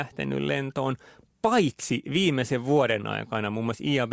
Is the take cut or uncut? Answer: uncut